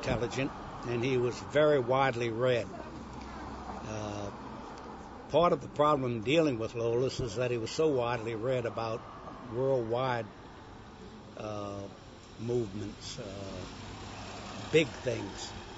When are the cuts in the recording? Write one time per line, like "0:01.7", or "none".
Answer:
none